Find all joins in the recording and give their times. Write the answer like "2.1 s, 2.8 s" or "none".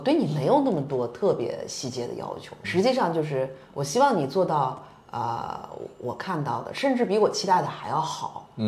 2.6 s

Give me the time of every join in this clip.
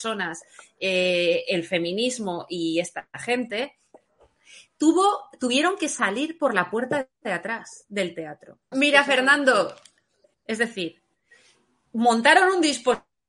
8.7 s, 10.2 s

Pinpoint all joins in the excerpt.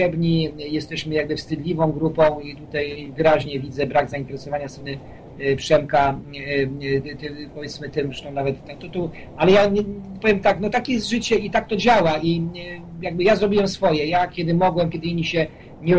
10.7 s, 14.9 s

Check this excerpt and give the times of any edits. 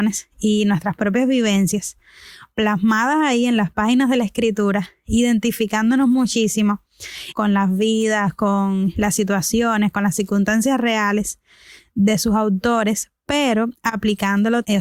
7.3 s

